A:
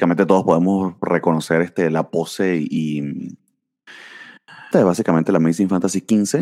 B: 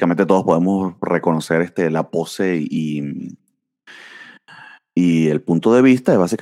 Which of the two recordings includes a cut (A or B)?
A